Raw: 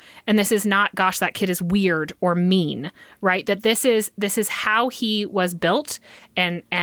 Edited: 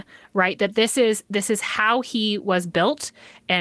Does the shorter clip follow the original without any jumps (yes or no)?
yes